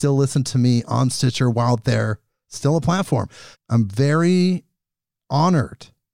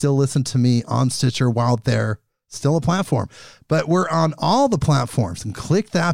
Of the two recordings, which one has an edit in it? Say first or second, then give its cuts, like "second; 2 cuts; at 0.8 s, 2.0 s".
first; 1 cut; at 3.5 s